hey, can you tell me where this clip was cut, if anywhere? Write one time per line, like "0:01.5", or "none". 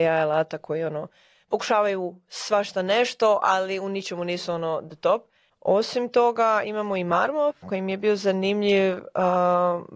0:05.5
0:07.6